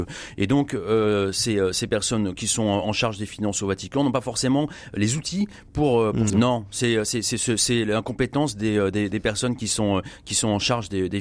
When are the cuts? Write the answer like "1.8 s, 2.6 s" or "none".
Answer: 6.3 s